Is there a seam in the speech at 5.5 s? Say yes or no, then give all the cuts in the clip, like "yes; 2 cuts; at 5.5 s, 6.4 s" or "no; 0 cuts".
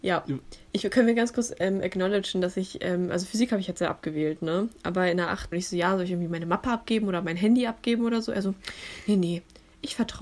yes; 1 cut; at 5.5 s